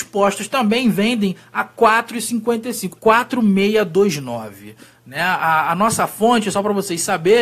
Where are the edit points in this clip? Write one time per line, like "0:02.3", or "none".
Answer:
0:03.0